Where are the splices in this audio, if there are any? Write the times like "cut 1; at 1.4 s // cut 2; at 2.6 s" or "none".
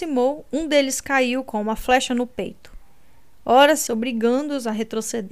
cut 1; at 3.9 s